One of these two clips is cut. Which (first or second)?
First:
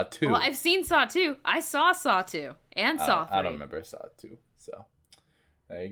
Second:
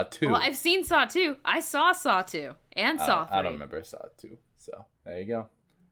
second